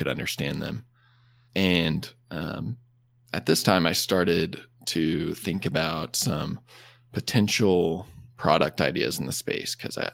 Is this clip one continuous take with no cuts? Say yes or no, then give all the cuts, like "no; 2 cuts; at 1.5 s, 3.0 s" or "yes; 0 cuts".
yes; 0 cuts